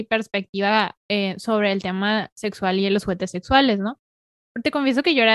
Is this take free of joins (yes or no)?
no